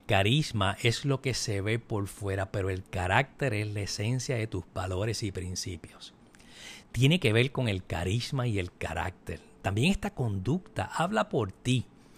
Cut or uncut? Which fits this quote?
cut